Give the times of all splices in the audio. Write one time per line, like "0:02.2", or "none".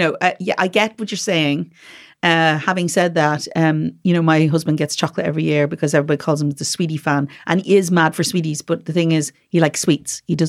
none